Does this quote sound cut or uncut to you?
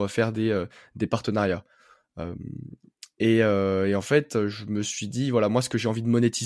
uncut